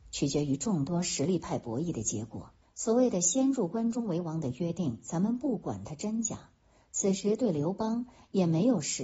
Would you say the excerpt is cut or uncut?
cut